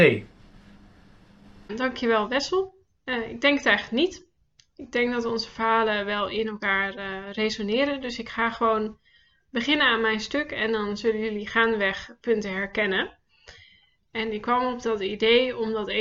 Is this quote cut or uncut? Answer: cut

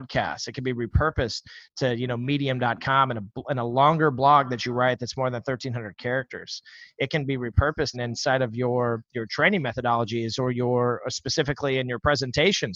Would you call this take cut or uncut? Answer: cut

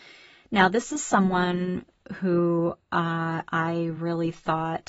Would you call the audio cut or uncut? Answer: uncut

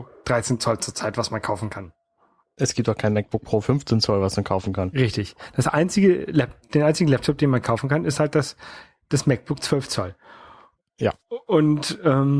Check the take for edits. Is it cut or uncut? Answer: uncut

